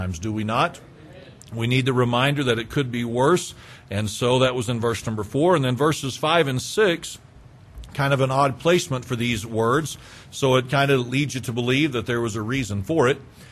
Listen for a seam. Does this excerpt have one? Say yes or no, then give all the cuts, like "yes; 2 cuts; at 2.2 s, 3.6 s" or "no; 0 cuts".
no; 0 cuts